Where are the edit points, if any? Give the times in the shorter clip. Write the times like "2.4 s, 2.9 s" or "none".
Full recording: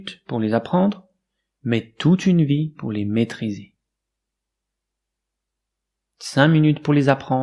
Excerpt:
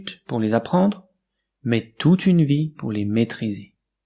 none